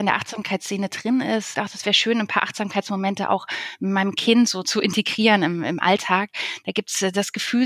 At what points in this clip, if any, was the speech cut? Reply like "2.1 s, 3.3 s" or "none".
1.5 s